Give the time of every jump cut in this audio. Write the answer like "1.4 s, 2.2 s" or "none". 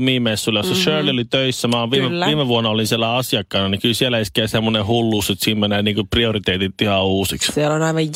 none